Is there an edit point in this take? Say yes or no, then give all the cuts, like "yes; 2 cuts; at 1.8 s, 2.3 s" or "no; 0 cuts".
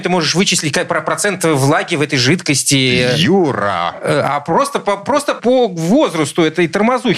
no; 0 cuts